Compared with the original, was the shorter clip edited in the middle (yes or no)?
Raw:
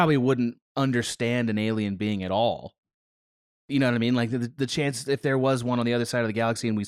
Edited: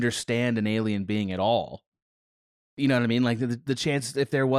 no